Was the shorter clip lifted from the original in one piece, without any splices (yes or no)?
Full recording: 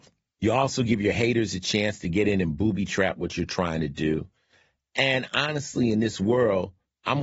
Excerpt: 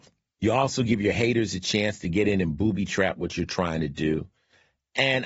yes